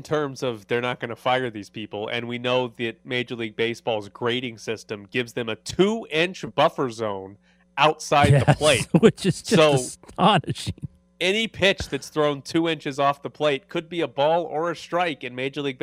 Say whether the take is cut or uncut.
uncut